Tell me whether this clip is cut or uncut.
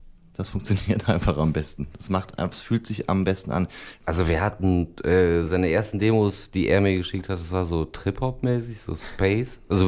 uncut